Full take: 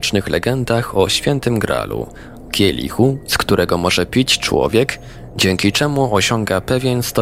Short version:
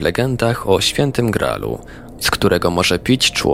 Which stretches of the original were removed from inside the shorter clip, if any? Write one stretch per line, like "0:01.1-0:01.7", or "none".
0:02.5-0:03.3